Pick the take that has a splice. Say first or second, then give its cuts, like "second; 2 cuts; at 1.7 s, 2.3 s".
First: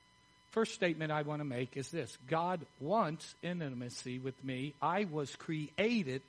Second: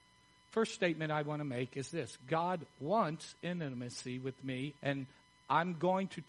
second; 1 cut; at 4.8 s